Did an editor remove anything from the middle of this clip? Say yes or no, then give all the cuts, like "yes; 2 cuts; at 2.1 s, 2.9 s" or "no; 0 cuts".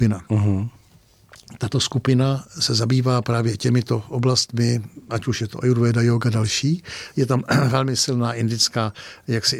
no; 0 cuts